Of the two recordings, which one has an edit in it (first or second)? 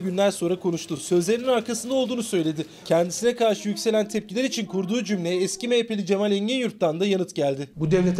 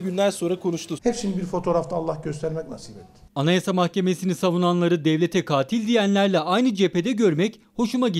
second